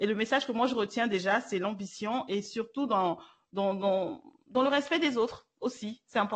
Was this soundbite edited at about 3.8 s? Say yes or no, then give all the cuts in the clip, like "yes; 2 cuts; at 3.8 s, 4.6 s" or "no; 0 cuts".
no; 0 cuts